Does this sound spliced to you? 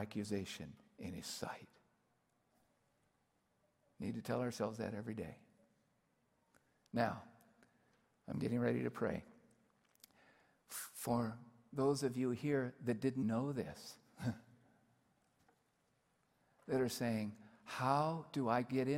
yes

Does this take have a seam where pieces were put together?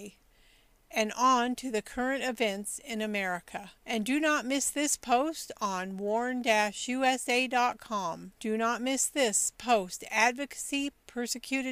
yes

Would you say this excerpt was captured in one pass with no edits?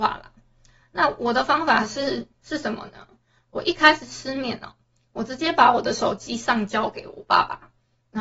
yes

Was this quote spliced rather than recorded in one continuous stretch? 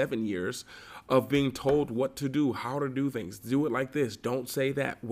no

